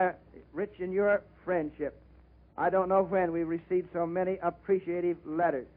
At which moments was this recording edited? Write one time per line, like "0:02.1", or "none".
none

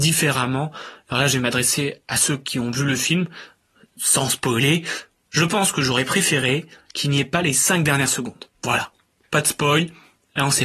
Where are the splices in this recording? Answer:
0:08.5

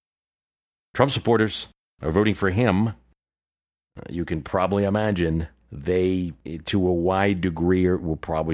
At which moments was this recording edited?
none

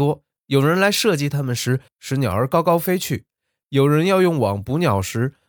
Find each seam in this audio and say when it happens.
0:01.9

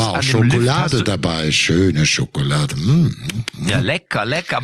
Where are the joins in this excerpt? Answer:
none

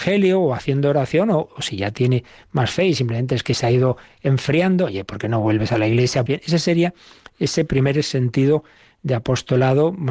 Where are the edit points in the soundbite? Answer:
0:06.3

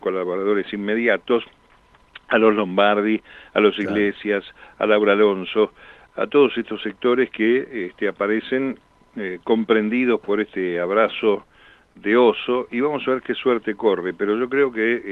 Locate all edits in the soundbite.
0:06.0

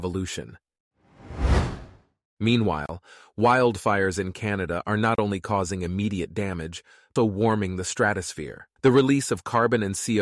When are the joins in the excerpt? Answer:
0:07.2
0:08.8

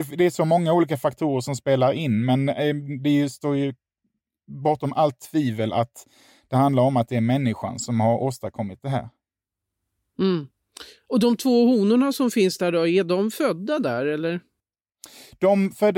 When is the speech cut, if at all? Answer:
none

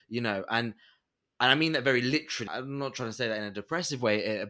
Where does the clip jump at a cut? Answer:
0:02.5

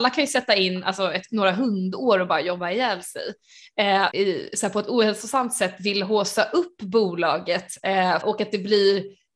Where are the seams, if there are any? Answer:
0:04.1
0:08.2

